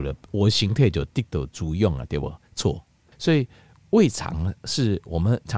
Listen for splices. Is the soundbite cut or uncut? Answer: cut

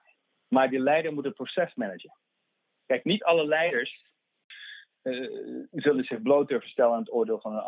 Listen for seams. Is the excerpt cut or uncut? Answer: cut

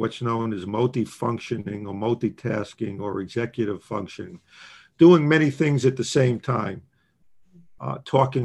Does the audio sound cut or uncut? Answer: uncut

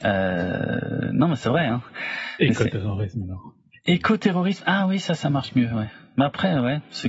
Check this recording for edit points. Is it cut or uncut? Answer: uncut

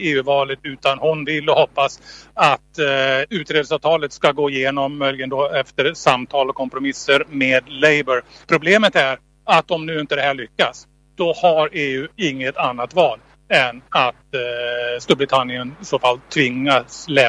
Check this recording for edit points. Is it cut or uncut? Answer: cut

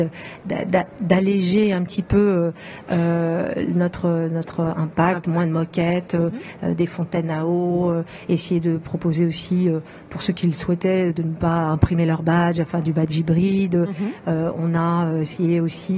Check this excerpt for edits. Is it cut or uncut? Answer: uncut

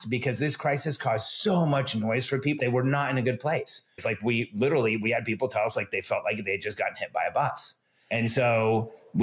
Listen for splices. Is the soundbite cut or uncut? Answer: cut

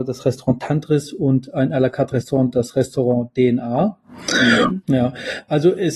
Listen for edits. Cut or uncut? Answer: cut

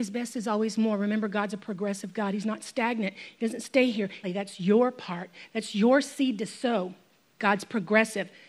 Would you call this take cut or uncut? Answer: cut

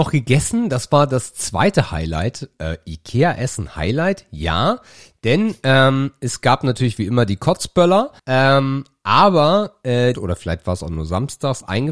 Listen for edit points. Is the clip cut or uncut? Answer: cut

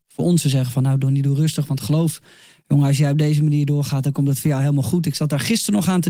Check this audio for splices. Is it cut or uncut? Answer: uncut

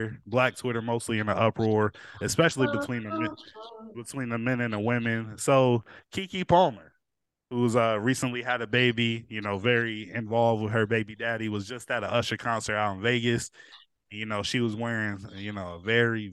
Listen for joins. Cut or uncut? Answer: uncut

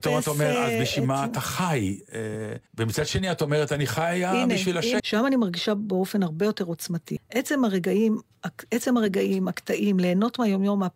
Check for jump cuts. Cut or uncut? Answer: cut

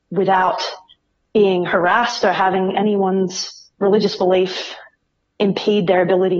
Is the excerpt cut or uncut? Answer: cut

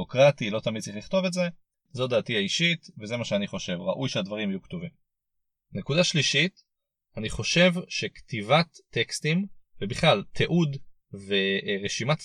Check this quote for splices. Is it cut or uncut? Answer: cut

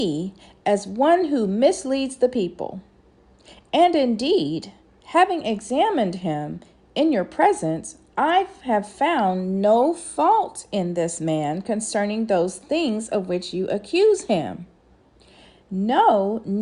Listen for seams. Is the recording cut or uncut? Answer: uncut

